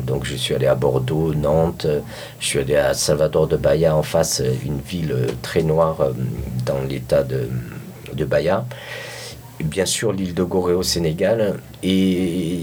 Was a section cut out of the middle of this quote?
no; 0 cuts

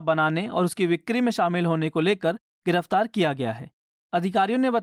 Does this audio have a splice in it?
no; 0 cuts

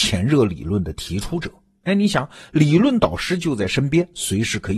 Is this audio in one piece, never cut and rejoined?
yes; 0 cuts

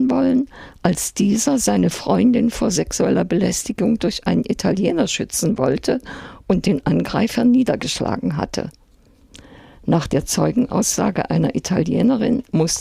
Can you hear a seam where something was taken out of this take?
no; 0 cuts

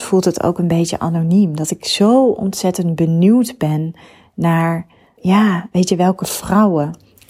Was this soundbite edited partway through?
yes; 1 cut; at 5.2 s

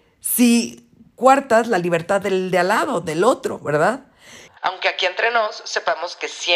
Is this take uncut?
no; 1 cut; at 4.5 s

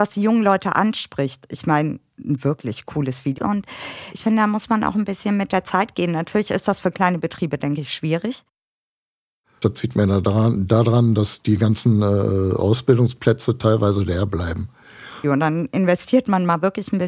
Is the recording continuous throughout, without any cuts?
no; 3 cuts; at 3.4 s, 9.6 s, 15.2 s

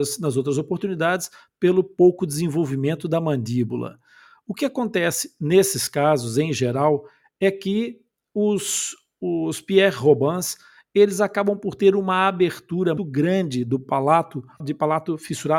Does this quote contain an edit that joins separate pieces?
yes; 2 cuts; at 13.0 s, 14.6 s

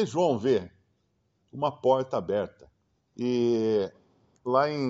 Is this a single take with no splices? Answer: no; 1 cut; at 3.1 s

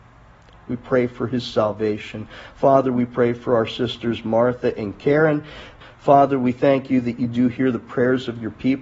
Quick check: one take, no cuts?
no; 1 cut; at 5.8 s

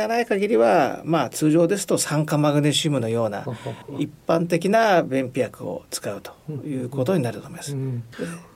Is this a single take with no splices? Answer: yes; 0 cuts

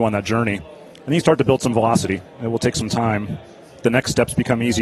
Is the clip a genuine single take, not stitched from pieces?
yes; 0 cuts

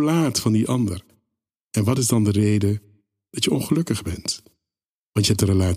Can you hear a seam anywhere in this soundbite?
no; 0 cuts

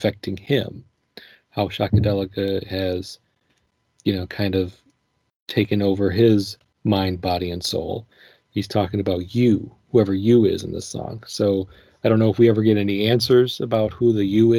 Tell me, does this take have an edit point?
no; 0 cuts

